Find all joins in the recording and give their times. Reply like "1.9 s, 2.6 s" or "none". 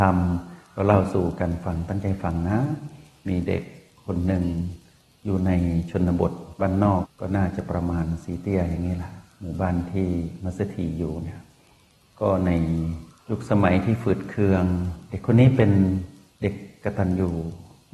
7.0 s